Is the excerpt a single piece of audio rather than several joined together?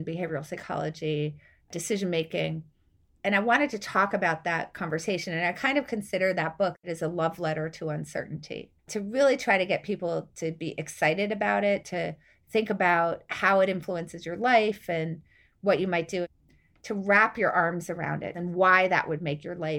no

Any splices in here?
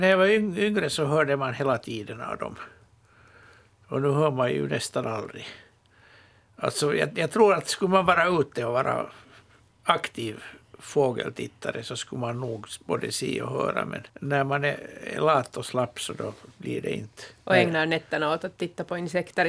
yes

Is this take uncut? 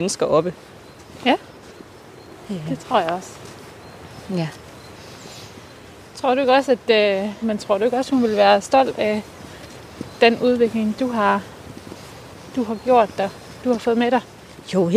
no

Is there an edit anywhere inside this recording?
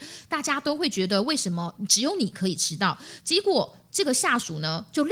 yes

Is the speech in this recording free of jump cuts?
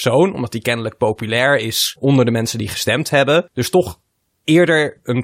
yes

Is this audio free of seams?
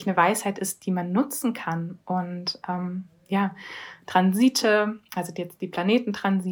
yes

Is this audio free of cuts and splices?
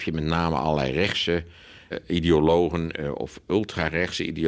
no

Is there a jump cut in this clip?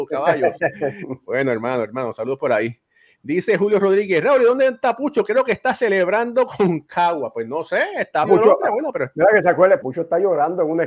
yes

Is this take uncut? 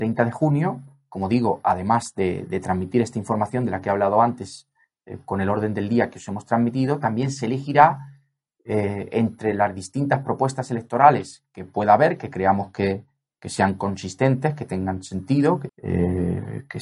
no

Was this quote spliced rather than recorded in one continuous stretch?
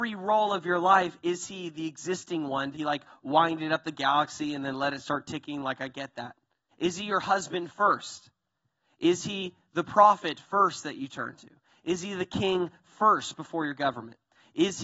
yes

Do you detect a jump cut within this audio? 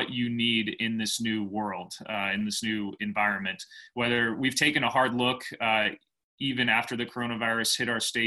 no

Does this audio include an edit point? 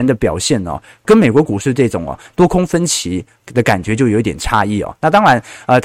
yes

